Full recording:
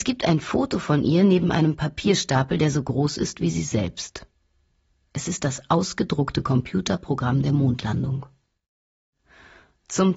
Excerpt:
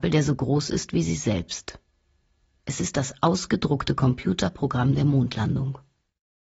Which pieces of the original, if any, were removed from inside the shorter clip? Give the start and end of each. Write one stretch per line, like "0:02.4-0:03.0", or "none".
none